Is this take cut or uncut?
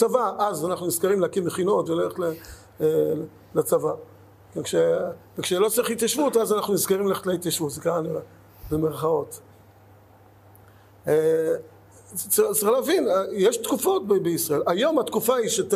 uncut